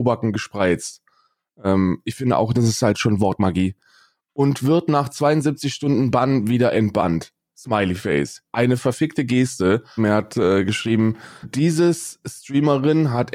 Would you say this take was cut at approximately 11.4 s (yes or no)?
yes